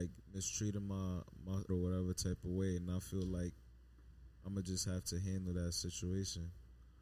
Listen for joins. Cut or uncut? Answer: cut